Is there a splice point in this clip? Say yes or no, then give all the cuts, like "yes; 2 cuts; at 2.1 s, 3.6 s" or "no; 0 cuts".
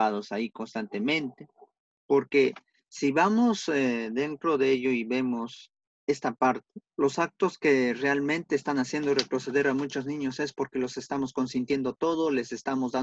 yes; 2 cuts; at 2.0 s, 6.9 s